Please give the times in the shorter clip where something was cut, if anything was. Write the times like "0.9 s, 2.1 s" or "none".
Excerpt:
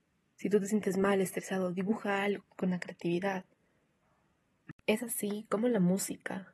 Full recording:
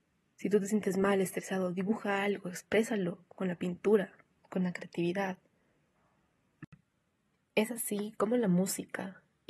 2.4 s, 4.8 s